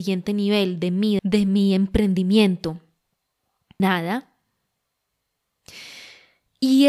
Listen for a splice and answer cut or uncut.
cut